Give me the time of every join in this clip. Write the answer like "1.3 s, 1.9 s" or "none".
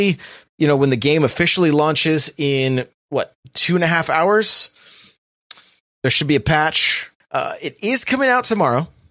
3.0 s, 7.2 s